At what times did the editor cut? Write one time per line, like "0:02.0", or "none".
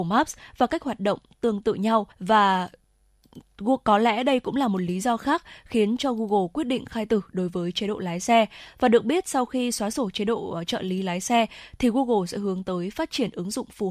0:02.1